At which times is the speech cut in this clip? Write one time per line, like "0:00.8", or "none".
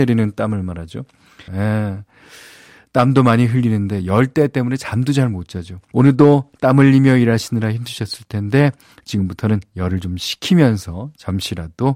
0:01.5
0:05.9

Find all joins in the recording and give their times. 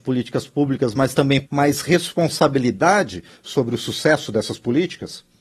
0:01.4

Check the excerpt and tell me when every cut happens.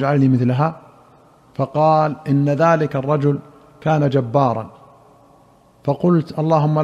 none

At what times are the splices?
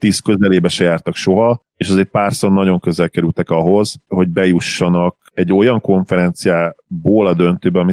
0:04.1

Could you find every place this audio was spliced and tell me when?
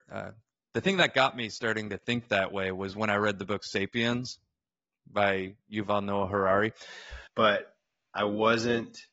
0:07.3

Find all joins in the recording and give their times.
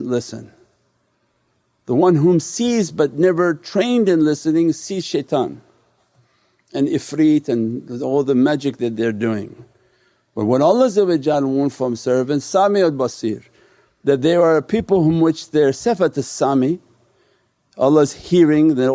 none

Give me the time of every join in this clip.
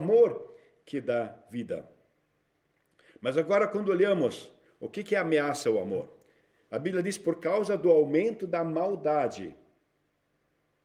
none

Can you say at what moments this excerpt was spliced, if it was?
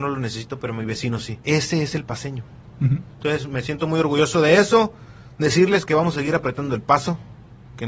0:01.4

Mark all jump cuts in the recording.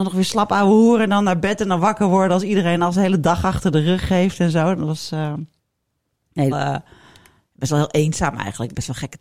0:06.5

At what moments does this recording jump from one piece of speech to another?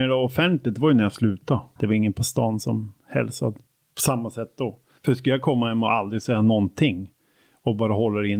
0:01.8
0:05.0

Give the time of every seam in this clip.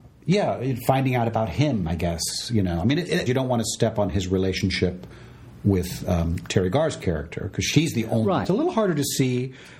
0:03.3
0:08.4

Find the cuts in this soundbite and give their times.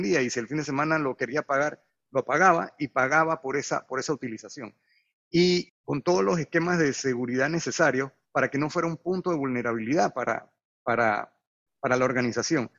0:05.7

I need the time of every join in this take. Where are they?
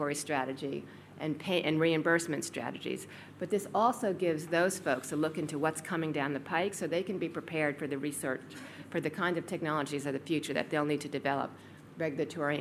none

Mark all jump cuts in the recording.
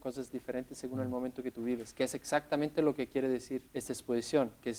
0:03.7

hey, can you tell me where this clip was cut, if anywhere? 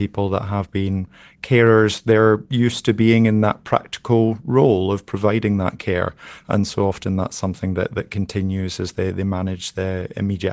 none

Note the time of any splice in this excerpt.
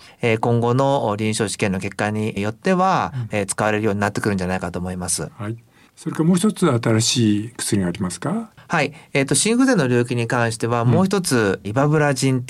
0:03.3

